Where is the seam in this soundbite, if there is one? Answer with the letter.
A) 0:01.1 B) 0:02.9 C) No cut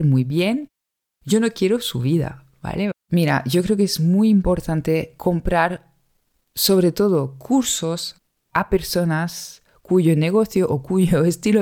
B